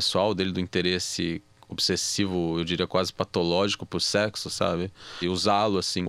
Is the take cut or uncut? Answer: uncut